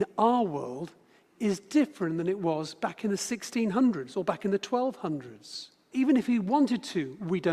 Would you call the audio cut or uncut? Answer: cut